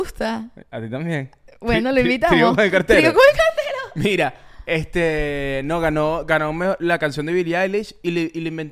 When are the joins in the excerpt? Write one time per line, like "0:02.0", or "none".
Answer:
none